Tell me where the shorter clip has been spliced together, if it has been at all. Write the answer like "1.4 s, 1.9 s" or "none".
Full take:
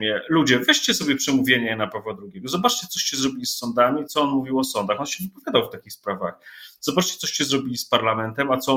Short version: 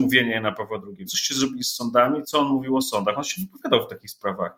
1.1 s